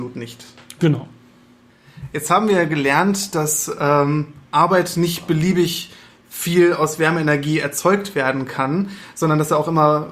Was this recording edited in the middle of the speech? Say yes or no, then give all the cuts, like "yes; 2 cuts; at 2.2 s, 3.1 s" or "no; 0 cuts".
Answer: no; 0 cuts